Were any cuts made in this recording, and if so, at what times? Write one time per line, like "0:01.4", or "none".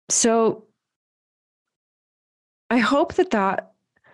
none